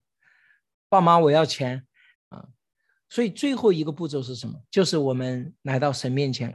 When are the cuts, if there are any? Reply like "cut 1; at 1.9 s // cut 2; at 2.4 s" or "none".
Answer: cut 1; at 2.1 s // cut 2; at 4.7 s